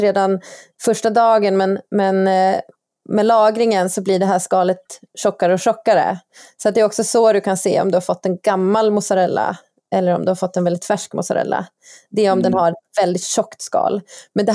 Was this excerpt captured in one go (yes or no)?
yes